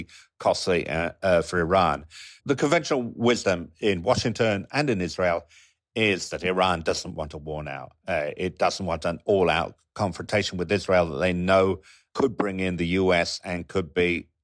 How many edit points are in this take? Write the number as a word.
two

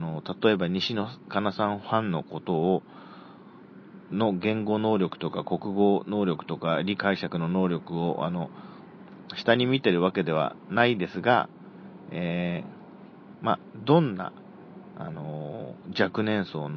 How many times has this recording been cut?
one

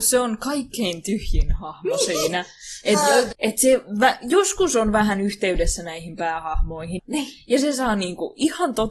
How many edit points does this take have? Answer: two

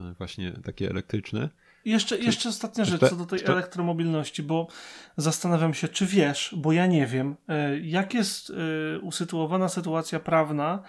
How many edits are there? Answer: one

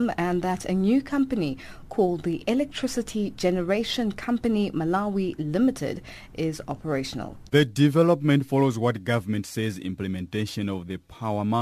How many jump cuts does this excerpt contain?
one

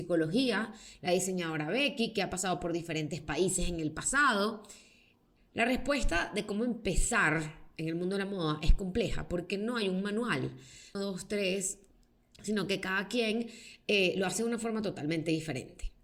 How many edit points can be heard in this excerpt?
two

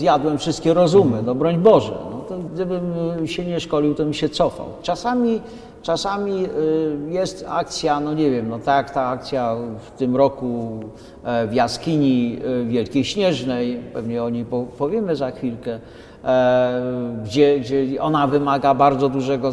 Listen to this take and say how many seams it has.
two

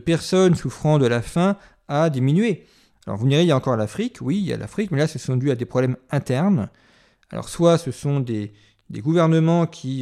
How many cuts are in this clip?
one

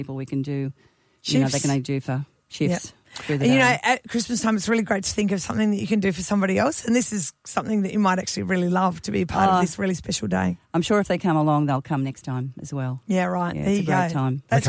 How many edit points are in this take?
zero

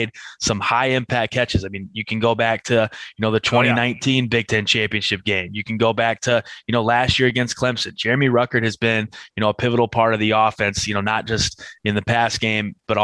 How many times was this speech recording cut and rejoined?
zero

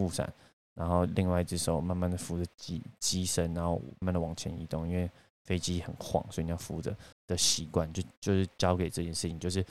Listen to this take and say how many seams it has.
two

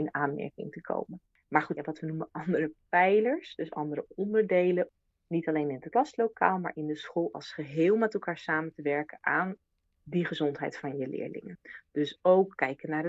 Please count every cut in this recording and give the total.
one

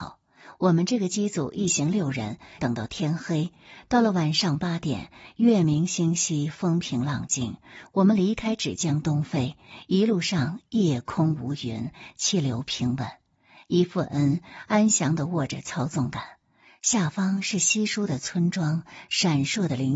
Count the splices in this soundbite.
one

